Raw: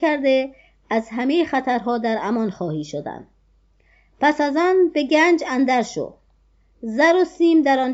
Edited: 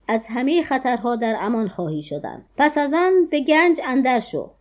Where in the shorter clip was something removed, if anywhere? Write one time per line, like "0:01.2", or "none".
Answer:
0:02.5